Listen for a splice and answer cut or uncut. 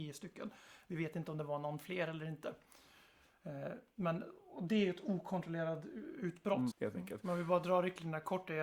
cut